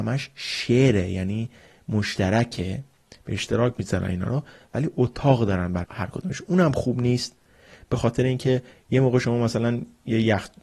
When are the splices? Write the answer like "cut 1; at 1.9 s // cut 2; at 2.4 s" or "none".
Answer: cut 1; at 5.8 s